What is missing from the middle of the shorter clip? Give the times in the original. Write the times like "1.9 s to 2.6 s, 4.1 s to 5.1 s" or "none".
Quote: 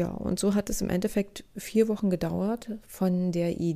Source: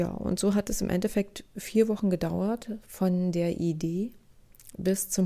none